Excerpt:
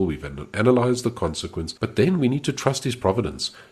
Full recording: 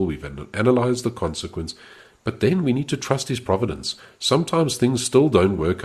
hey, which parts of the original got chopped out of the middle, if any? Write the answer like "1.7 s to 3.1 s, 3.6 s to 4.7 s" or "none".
1.8 s to 2.2 s

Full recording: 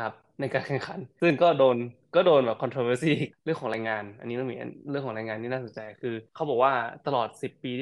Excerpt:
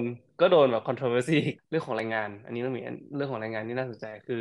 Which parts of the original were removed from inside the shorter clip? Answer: none

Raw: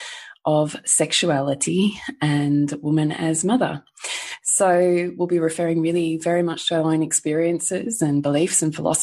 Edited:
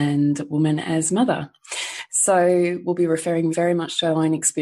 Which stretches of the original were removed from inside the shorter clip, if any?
5.8 s to 6.2 s

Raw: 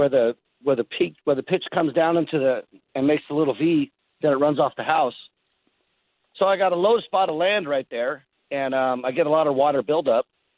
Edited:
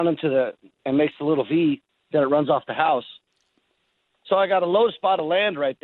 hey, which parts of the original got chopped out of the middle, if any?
none

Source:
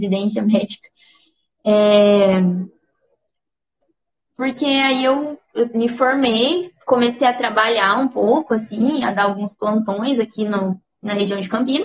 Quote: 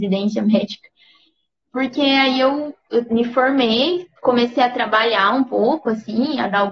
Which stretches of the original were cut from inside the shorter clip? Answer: 1.6 s to 4.2 s

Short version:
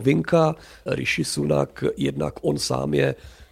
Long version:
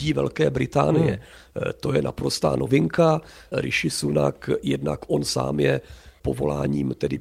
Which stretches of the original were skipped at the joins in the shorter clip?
none

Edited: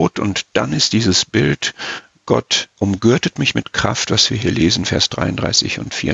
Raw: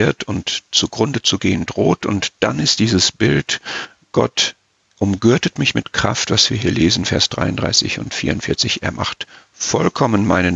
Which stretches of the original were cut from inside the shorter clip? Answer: 4.6 s to 4.9 s

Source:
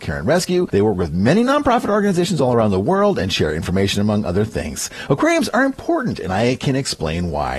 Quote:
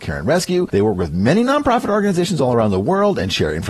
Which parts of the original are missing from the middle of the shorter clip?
none

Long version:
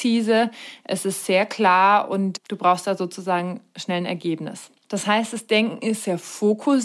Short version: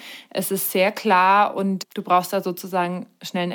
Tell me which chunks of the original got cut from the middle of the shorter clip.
none

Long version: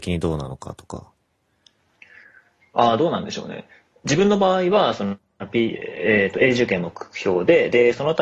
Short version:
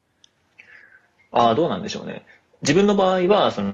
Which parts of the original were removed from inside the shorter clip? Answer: none

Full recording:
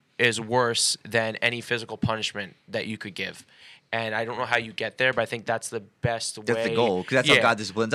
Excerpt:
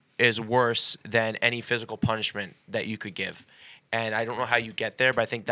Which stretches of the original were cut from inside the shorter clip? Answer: none

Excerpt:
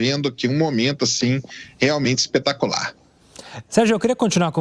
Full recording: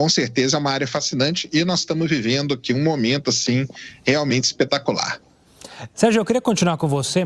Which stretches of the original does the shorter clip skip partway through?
none

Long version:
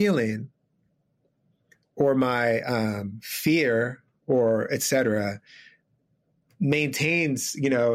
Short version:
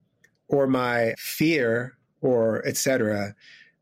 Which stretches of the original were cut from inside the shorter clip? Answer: 2.6 s to 3.2 s

